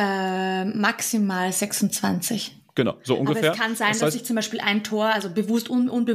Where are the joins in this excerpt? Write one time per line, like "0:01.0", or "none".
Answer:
none

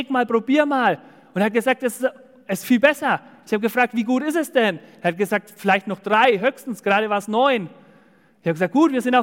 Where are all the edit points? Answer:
none

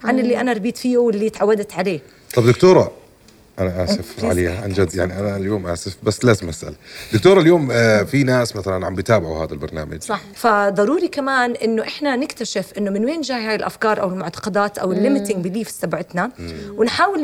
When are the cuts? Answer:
0:10.3

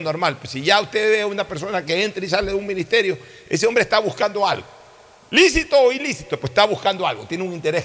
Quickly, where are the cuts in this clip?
none

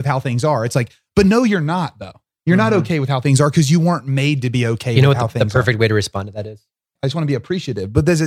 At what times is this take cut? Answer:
0:07.0

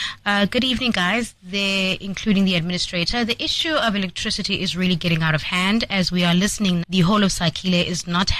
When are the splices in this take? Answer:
0:06.8

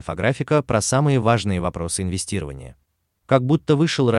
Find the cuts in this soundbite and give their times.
none

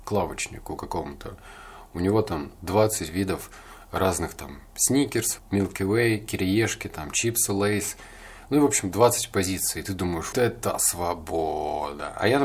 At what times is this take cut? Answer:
0:05.4
0:10.3

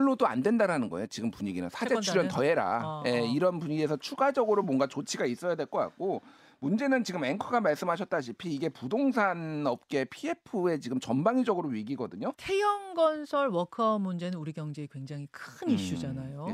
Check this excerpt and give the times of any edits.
0:12.3

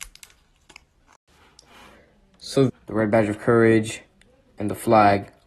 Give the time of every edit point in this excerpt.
0:02.7

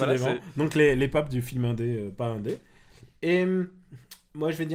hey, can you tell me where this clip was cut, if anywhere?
none

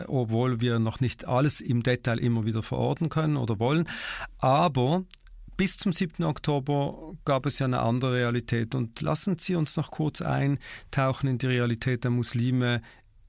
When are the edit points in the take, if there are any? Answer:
none

